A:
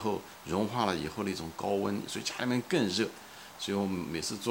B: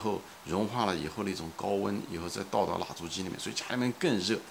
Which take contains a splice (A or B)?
A